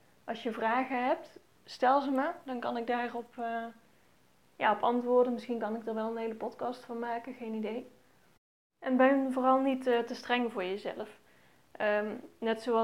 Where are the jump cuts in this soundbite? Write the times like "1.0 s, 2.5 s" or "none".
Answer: none